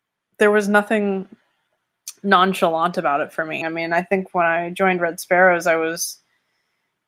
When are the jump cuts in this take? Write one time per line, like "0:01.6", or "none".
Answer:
0:03.6